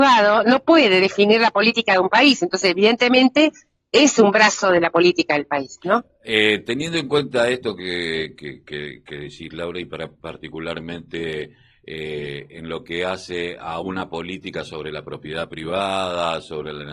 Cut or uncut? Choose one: uncut